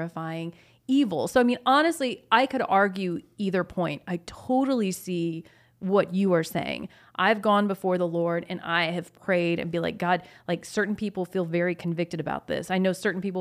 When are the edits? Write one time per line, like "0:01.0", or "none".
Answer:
none